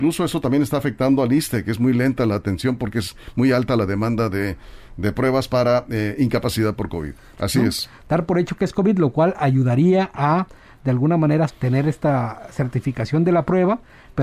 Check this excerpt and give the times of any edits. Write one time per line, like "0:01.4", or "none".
0:07.3
0:11.5